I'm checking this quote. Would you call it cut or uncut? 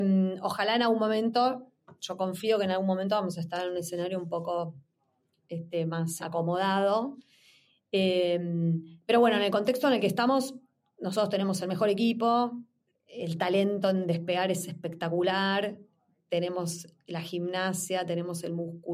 cut